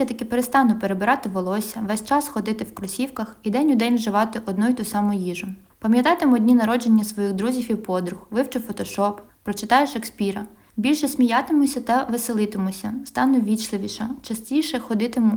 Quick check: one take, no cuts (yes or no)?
no